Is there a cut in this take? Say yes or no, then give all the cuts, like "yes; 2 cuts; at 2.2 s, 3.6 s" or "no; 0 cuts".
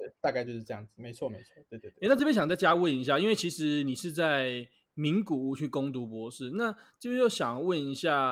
no; 0 cuts